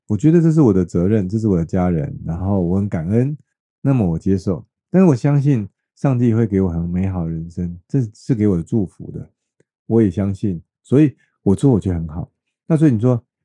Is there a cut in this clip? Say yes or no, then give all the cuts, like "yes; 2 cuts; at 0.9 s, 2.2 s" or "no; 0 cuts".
no; 0 cuts